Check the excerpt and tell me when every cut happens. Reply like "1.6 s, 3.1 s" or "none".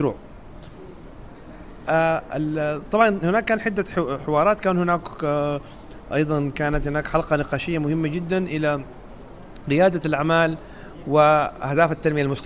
none